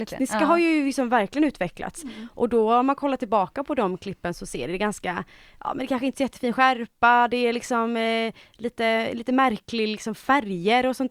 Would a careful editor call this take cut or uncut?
uncut